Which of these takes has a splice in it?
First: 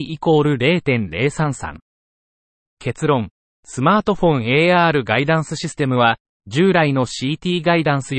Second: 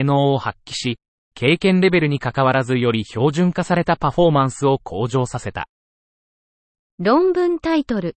first; 1 cut; at 6.4 s

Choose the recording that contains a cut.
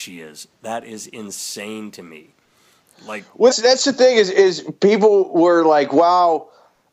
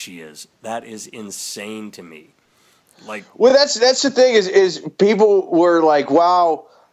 first; 1 cut; at 3.5 s

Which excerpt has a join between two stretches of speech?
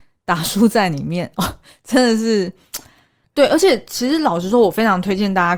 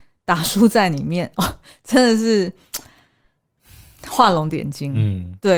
first; 1 cut; at 3.2 s

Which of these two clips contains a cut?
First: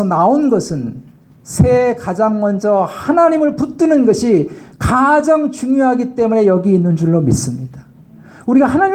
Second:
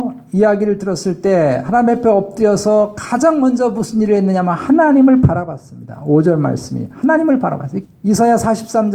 second; 1 cut; at 7.8 s

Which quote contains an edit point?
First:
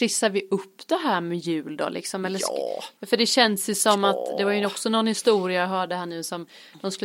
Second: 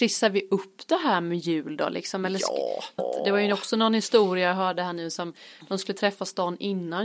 second; 1 cut; at 3.0 s

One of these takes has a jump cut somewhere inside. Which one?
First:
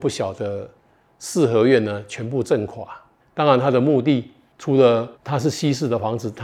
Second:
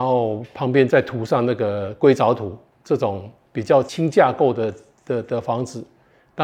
first; 2 cuts; at 3.2 s, 5.1 s

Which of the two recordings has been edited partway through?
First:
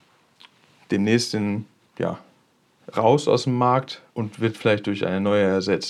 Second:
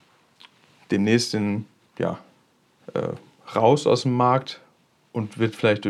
first; 2 cuts; at 2.9 s, 4.1 s

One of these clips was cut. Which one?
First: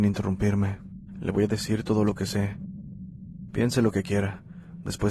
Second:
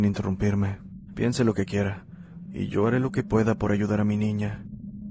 second; 2 cuts; at 1.1 s, 2.5 s

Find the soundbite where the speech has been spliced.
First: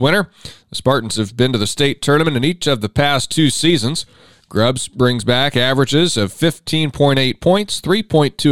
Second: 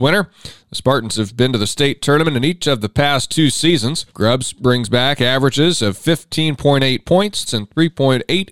second; 2 cuts; at 4.1 s, 7.5 s

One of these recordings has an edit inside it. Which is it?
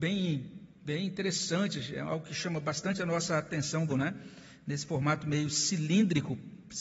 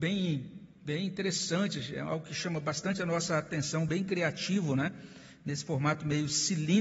first; 1 cut; at 3.9 s

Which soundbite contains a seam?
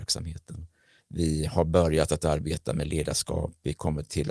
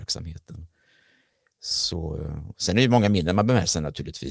first; 1 cut; at 1.0 s

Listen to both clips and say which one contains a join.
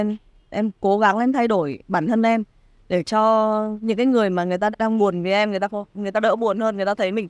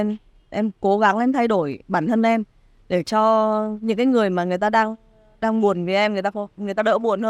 first; 1 cut; at 4.7 s

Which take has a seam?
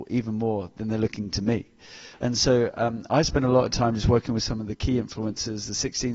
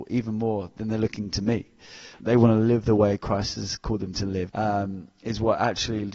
second; 2 cuts; at 2.2 s, 4.5 s

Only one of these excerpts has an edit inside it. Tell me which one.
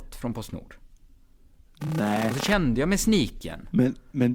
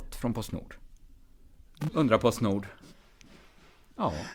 second; 1 cut; at 1.9 s

